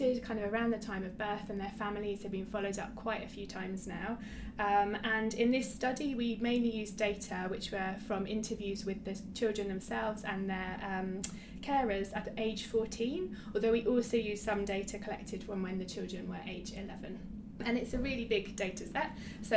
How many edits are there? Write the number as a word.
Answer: zero